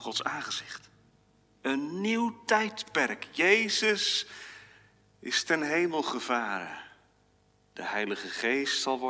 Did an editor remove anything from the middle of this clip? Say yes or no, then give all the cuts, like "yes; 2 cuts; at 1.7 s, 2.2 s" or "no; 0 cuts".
no; 0 cuts